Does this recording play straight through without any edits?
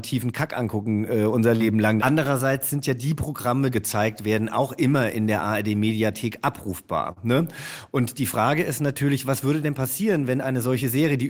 no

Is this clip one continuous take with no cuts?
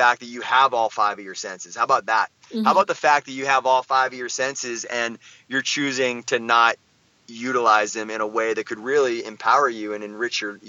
yes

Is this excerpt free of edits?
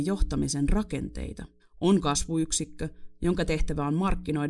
no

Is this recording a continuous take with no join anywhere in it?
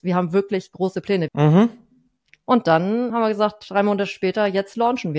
no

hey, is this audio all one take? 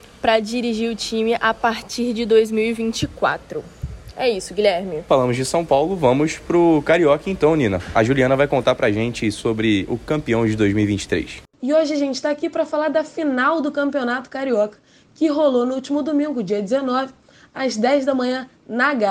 yes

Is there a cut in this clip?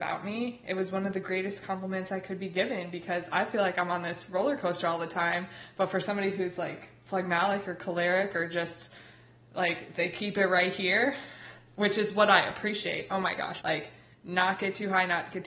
yes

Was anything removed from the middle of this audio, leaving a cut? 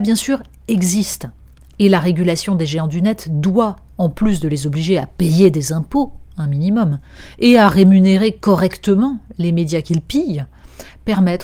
no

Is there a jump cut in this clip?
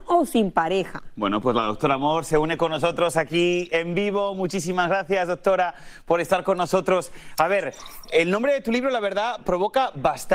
no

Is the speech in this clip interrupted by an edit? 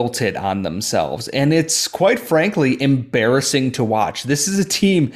no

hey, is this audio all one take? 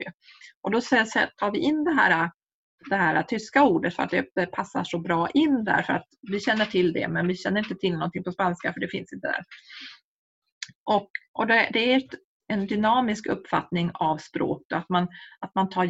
yes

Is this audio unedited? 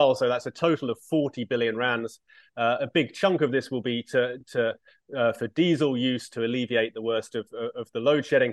yes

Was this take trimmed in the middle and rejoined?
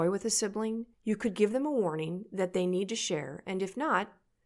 yes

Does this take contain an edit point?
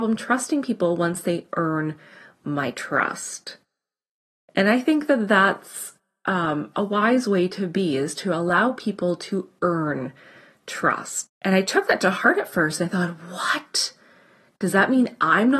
yes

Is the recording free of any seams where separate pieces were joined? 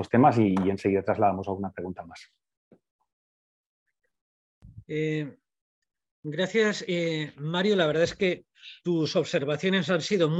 yes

